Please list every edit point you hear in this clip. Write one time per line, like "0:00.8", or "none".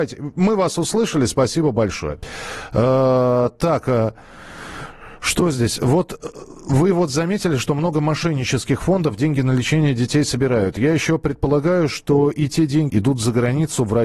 0:12.9